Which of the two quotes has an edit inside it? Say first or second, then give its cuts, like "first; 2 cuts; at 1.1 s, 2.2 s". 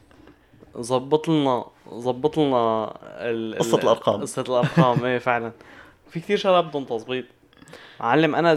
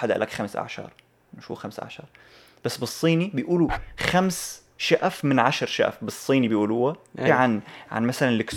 second; 1 cut; at 7.3 s